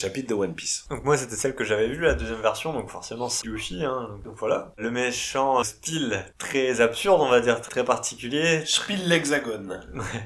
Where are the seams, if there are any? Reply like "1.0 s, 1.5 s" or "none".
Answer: 3.4 s, 5.6 s

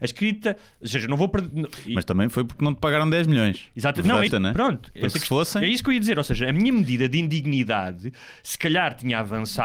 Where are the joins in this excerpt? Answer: 4.3 s

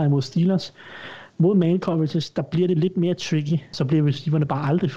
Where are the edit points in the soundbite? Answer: 1.3 s, 3.7 s

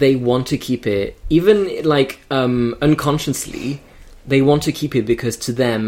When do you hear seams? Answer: none

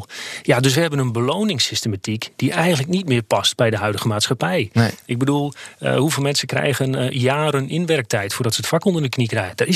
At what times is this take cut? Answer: none

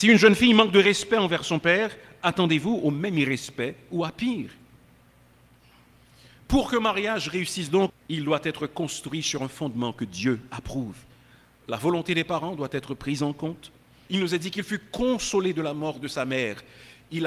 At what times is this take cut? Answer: 7.9 s, 14.1 s

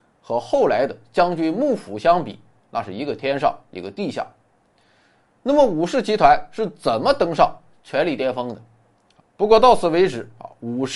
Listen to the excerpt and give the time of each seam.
9.2 s

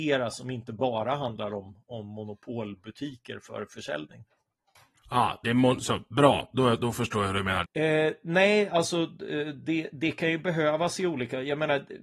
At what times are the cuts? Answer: 7.6 s

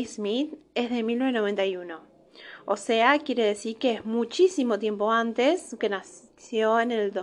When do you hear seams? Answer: 5.8 s

